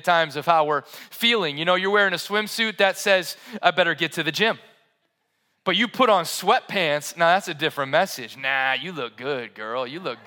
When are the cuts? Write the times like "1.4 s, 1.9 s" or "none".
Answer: none

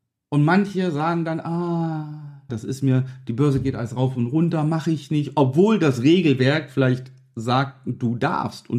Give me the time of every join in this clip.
2.5 s

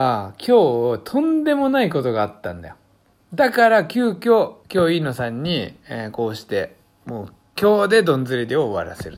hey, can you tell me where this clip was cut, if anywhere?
4.6 s

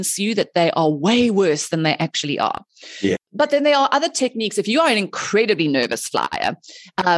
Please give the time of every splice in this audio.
3.2 s

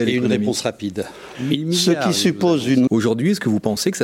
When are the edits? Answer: 1.3 s, 2.9 s

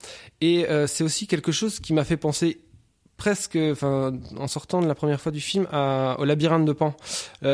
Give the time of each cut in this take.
none

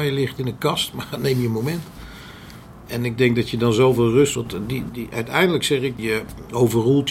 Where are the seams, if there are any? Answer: none

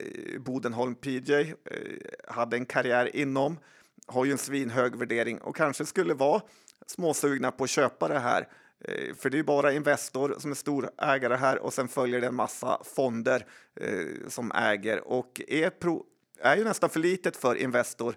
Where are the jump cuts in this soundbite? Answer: none

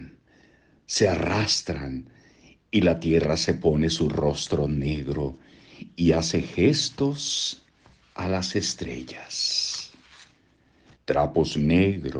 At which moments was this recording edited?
11.0 s

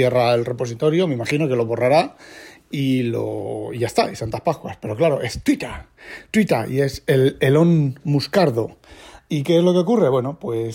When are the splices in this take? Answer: none

